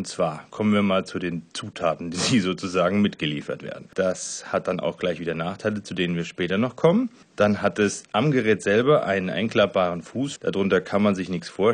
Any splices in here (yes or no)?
yes